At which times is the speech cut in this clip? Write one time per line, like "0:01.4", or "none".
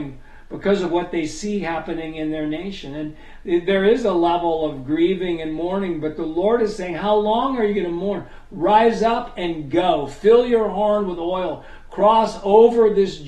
none